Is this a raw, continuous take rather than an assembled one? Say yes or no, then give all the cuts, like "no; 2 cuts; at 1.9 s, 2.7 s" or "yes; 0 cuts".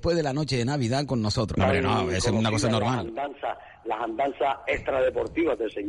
no; 1 cut; at 1.5 s